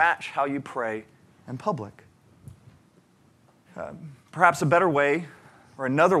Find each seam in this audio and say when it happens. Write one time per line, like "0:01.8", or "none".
0:03.7